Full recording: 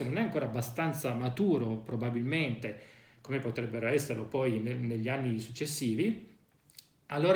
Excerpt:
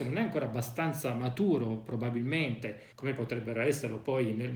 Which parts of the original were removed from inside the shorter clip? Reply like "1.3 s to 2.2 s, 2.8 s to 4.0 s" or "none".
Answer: 2.9 s to 3.2 s